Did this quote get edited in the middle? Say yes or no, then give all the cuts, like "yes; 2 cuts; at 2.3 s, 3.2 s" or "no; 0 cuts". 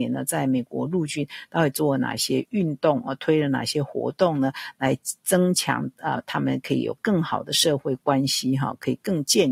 yes; 1 cut; at 6.2 s